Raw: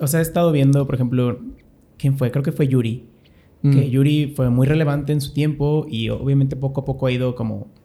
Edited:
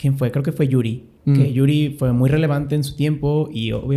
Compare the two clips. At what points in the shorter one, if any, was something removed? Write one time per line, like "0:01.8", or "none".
0:01.2